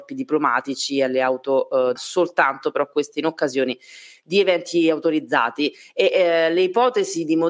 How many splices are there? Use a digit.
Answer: 1